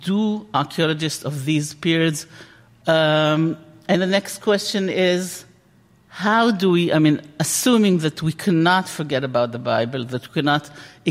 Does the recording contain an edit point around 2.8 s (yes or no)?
yes